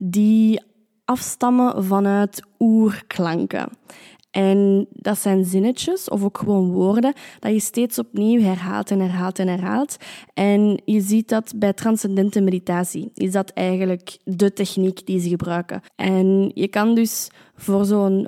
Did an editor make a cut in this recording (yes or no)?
yes